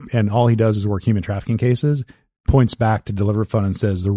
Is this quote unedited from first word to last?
yes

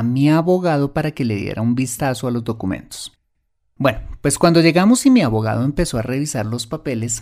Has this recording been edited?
no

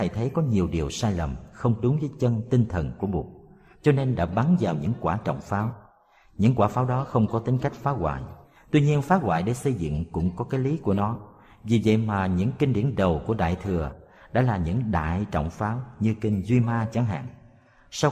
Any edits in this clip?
no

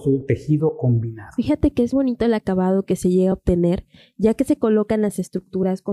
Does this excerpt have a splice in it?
yes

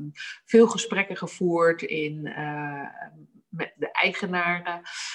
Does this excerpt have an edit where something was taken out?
yes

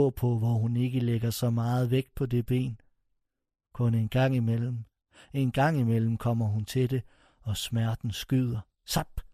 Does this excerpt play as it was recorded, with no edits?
yes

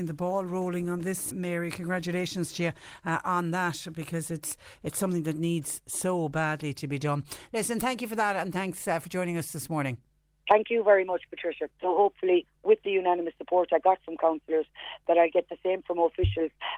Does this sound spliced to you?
yes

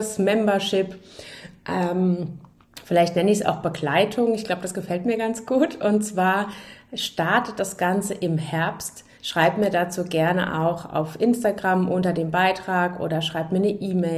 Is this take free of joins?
no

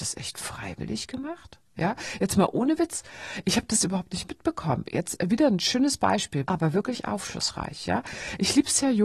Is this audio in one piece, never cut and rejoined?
no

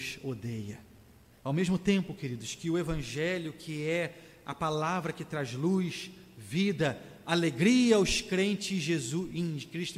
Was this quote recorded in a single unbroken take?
no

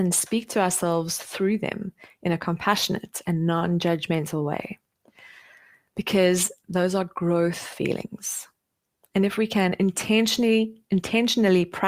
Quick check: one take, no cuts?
yes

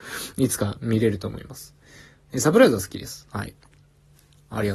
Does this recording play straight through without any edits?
yes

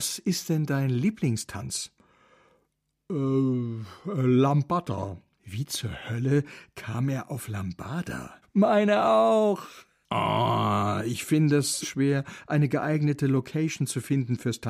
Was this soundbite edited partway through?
yes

